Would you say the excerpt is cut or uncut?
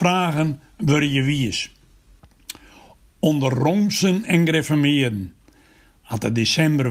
uncut